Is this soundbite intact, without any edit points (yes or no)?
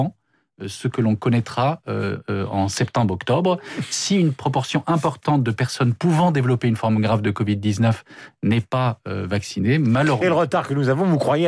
no